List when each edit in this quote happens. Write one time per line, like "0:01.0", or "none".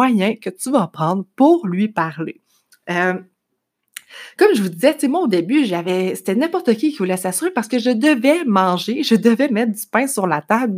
none